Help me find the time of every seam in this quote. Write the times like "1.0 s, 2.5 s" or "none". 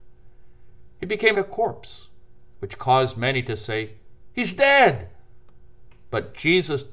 1.3 s